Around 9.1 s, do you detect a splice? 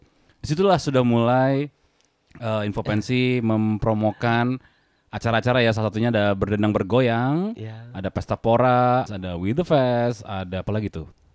yes; 1 cut; at 9.1 s

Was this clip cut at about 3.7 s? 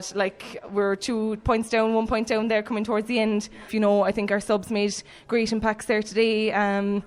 yes; 2 cuts; at 1.4 s, 3.7 s

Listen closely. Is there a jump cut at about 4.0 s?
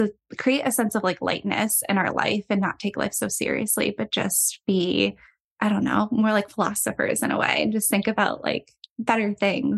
no; 0 cuts

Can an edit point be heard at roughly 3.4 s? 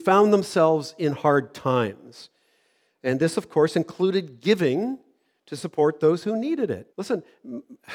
no; 1 cut; at 6.9 s

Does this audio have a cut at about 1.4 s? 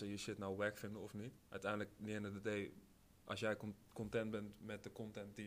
yes; 1 cut; at 1.4 s

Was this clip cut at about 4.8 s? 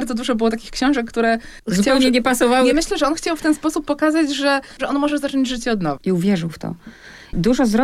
yes; 3 cuts; at 2.7 s, 4.8 s, 6.0 s

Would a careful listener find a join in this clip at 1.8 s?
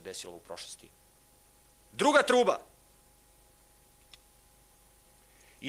yes; 1 cut; at 1.8 s

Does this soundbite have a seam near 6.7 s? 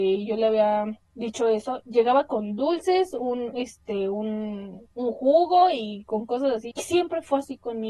yes; 2 cuts; at 4.9 s, 6.7 s

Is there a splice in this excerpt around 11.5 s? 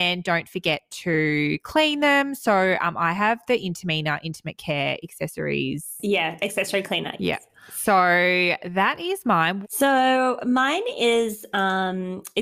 no; 2 cuts; at 7.2 s, 9.6 s

